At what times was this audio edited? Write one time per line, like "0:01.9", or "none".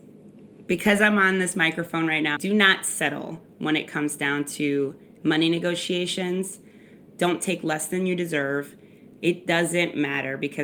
0:02.4